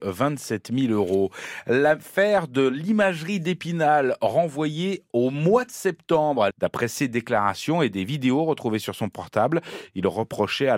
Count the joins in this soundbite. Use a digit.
1